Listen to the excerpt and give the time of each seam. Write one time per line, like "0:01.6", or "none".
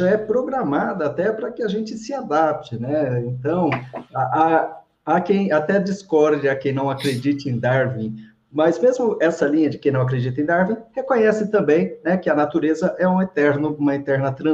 none